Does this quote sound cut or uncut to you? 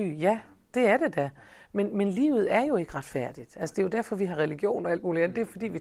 uncut